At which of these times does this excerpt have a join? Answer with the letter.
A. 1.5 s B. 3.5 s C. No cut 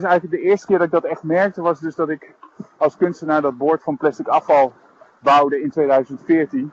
C